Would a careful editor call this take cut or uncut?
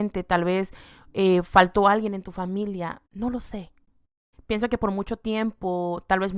cut